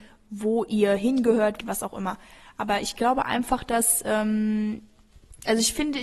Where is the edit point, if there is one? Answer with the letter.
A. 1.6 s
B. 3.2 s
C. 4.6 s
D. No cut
A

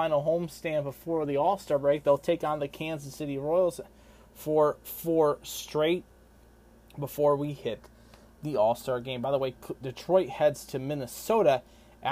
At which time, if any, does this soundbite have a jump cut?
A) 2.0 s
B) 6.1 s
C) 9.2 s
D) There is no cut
D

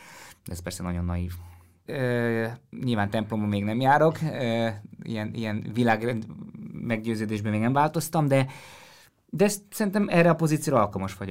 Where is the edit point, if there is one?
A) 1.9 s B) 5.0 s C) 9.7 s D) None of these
A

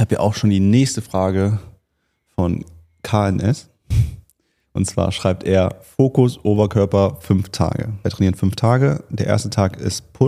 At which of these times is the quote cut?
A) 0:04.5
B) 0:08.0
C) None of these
B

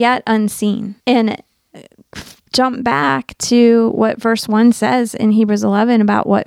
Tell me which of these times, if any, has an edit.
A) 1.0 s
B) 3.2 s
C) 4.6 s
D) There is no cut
A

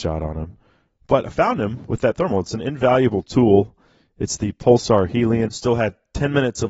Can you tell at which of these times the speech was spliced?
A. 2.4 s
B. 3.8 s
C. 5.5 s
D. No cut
C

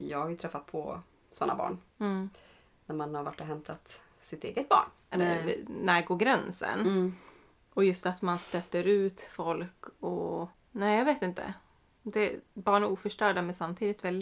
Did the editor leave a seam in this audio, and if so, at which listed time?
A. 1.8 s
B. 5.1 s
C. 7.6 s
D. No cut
B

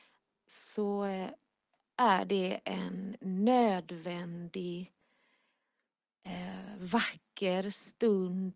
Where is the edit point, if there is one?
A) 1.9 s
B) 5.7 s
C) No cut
C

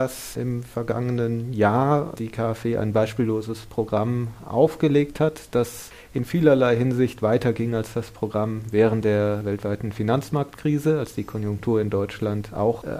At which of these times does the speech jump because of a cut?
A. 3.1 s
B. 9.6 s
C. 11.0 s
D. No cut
D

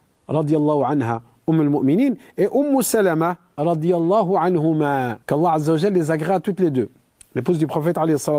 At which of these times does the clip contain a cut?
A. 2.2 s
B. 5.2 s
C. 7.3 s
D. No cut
B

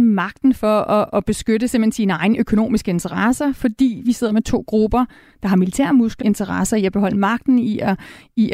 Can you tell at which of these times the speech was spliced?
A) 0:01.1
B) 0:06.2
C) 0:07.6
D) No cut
B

